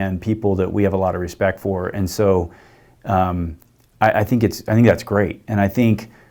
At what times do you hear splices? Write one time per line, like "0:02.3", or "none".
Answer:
none